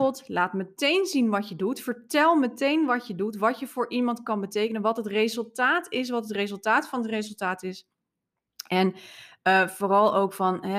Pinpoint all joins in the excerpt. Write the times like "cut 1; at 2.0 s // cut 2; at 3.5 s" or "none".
none